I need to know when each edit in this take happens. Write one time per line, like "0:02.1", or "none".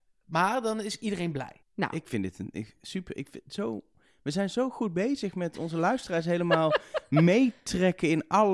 0:01.6